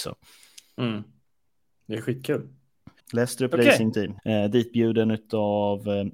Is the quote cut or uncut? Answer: cut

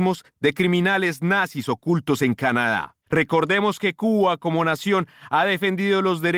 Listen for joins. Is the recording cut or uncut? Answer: cut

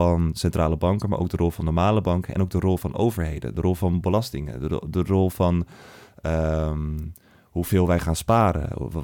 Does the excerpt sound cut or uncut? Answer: uncut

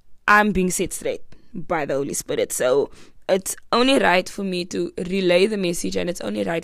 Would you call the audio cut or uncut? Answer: uncut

